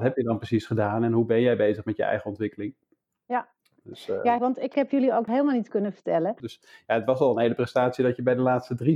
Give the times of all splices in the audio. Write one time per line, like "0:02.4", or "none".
0:04.4
0:06.4